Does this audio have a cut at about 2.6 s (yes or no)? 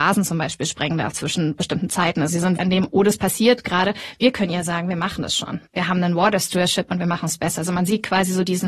yes